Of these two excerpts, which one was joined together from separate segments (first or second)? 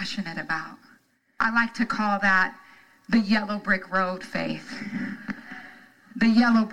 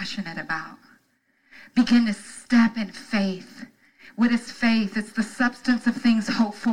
first